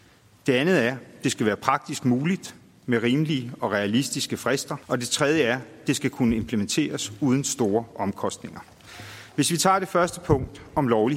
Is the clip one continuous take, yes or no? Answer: no